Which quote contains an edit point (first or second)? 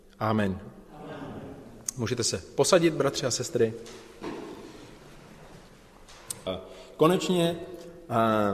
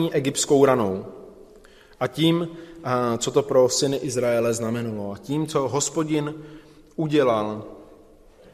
first